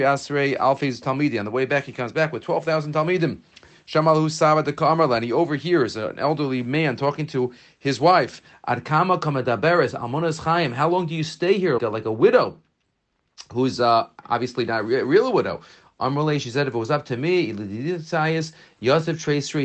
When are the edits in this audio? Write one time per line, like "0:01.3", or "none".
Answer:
0:11.8